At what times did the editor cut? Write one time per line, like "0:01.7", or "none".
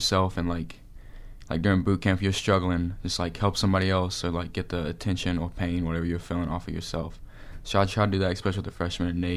none